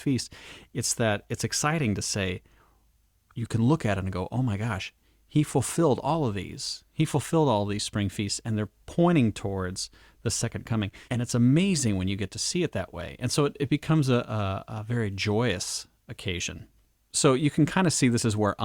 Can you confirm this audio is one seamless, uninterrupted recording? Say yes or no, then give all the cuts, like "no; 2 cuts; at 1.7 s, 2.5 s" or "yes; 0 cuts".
no; 1 cut; at 11.0 s